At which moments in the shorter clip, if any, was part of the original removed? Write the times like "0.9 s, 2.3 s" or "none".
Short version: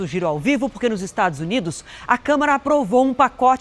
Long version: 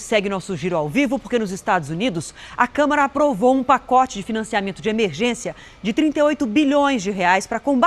none